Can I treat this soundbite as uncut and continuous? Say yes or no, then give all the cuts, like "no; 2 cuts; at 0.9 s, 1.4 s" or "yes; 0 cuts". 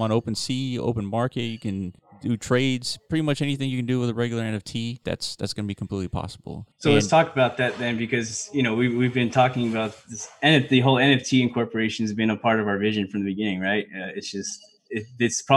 no; 1 cut; at 5.0 s